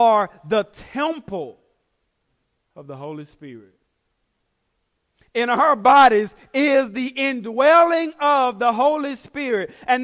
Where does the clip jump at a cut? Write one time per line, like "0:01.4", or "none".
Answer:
none